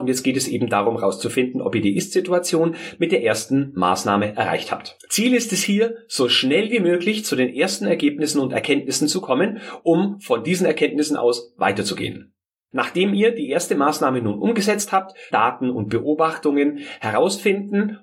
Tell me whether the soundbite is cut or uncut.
cut